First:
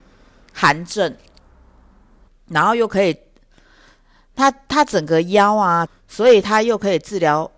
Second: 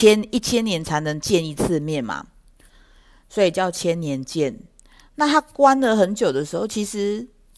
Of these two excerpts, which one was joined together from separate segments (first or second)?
first